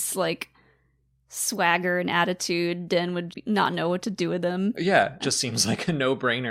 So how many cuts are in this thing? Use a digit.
2